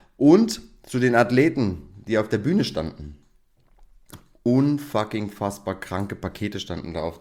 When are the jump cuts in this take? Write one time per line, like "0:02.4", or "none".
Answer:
none